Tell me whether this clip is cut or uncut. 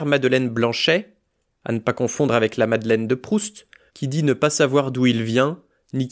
cut